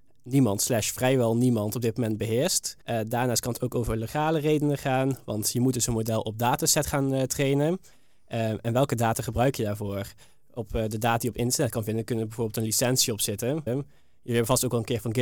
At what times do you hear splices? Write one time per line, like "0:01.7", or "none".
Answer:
0:02.8
0:13.7